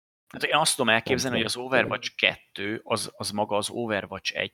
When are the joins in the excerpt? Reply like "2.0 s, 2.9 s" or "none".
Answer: none